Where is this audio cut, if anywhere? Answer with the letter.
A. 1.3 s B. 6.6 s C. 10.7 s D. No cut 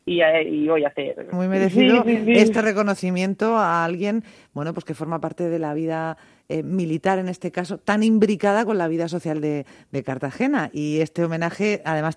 A